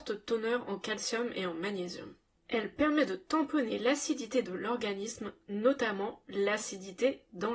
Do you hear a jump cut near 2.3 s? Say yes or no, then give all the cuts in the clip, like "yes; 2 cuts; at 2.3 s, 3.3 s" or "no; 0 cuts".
no; 0 cuts